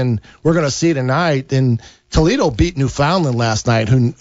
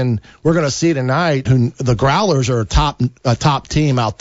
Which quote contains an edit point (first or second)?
second